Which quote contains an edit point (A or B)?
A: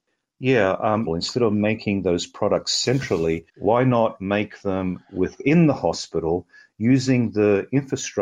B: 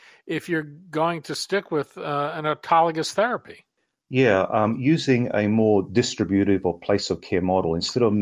A